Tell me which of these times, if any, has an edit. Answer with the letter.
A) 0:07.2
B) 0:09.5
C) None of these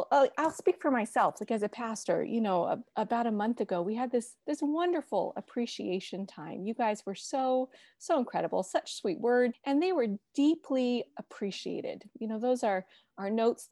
B